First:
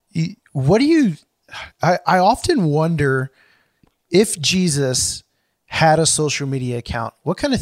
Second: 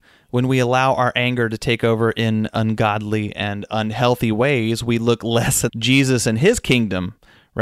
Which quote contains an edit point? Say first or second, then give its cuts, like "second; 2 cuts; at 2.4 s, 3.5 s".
second; 1 cut; at 5.7 s